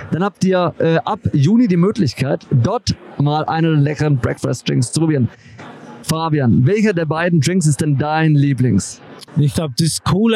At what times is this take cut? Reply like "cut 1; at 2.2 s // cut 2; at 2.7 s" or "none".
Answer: cut 1; at 9.3 s